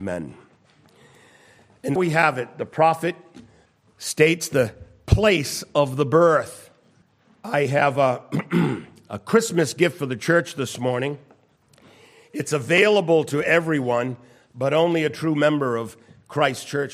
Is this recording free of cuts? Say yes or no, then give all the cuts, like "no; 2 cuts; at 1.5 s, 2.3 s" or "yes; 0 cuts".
no; 1 cut; at 2.0 s